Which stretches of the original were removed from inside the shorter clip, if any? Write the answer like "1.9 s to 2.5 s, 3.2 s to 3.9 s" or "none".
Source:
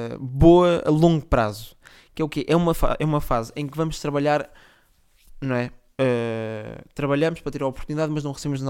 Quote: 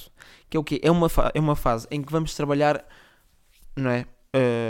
none